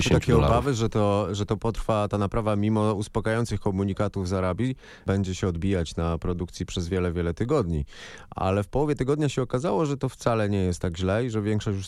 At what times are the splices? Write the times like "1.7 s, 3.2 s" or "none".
none